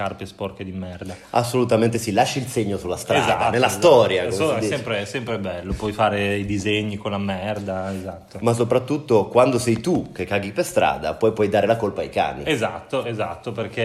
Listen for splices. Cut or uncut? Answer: uncut